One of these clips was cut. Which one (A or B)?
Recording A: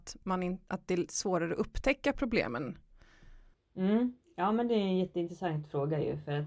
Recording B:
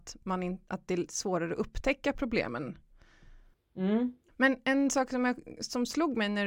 B